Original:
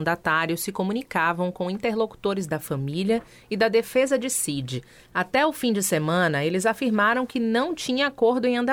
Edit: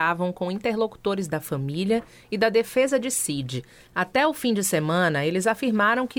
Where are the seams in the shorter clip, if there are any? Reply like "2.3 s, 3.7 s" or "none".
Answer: none